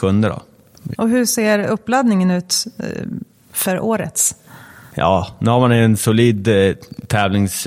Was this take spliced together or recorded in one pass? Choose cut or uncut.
cut